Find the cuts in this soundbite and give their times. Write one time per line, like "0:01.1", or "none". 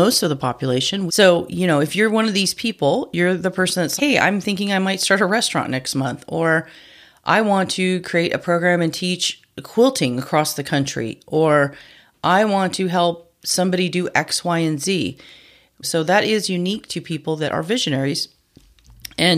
0:01.1
0:04.0
0:15.8